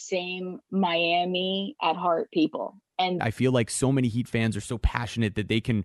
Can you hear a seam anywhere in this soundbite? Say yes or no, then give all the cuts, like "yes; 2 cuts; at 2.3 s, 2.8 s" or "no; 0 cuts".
yes; 1 cut; at 3.2 s